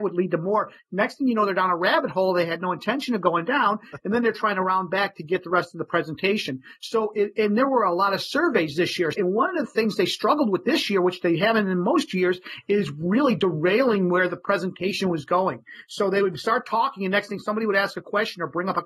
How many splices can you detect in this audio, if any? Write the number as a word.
one